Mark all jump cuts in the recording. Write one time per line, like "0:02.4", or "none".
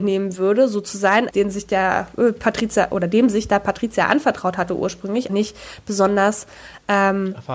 0:01.3
0:05.3